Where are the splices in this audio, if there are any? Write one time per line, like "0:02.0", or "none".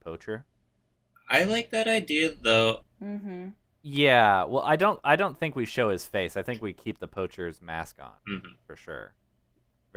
0:02.8
0:08.2